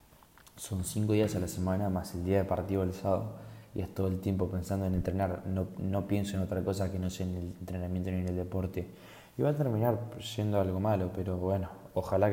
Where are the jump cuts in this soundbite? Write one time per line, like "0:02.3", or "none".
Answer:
none

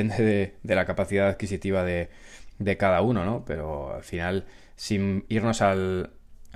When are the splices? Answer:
none

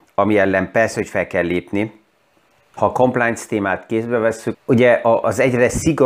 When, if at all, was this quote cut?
0:02.7
0:04.5

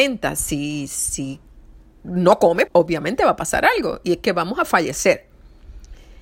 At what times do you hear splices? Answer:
0:02.7

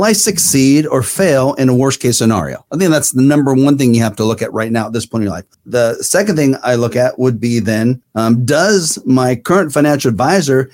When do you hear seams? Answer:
0:05.5

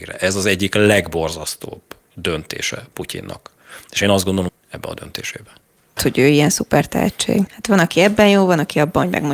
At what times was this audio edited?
0:04.5
0:06.0
0:07.5

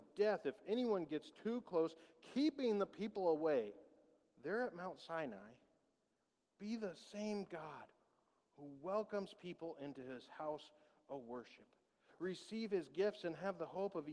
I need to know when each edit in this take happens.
0:12.1

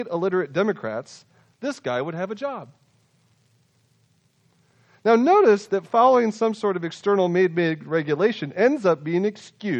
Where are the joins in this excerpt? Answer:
none

